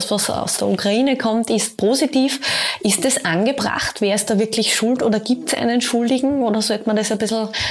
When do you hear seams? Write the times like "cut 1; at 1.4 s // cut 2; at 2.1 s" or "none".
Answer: none